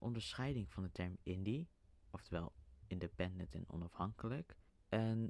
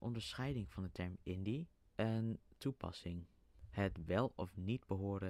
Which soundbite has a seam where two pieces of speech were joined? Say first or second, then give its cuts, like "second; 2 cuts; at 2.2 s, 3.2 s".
second; 1 cut; at 1.8 s